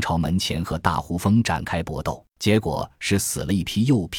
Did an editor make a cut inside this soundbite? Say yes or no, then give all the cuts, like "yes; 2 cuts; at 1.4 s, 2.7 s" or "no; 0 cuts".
yes; 1 cut; at 2.3 s